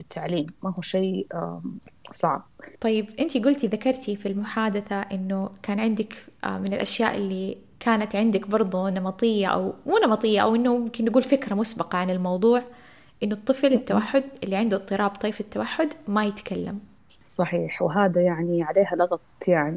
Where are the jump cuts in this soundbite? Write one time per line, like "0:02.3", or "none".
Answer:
0:02.8
0:17.2